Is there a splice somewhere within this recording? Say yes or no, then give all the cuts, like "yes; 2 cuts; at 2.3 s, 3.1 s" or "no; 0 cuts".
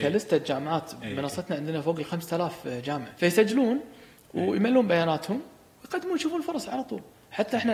no; 0 cuts